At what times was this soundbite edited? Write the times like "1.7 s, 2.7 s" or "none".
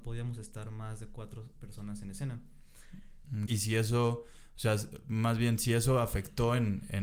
3.5 s